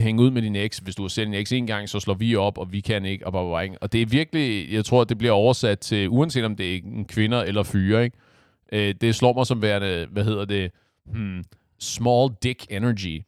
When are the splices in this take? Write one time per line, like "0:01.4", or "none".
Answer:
none